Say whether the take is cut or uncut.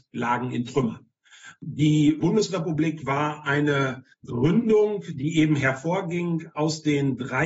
cut